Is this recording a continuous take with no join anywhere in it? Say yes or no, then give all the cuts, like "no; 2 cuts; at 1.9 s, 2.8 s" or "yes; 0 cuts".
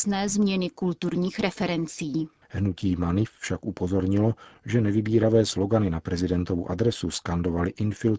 no; 1 cut; at 2.4 s